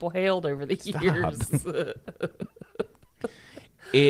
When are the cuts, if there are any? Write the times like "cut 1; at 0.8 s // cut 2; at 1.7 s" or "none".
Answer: none